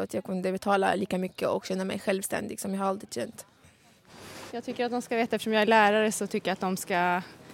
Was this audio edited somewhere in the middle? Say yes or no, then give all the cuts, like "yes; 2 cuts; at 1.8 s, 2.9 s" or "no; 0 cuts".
yes; 1 cut; at 4.5 s